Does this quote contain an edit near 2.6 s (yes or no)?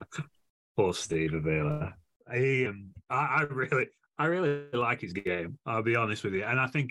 yes